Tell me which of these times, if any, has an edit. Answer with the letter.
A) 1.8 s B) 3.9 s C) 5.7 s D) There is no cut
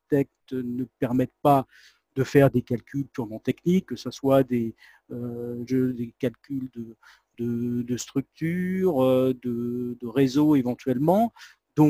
C